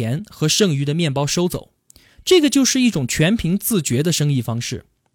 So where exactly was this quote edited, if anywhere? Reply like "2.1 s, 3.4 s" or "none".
none

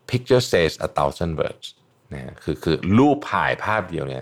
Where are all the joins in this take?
none

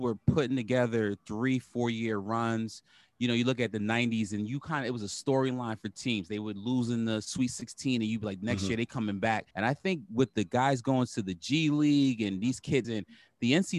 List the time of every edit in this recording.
9.5 s, 12.8 s

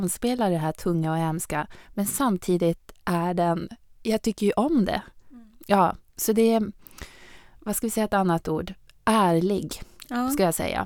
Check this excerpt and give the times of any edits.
none

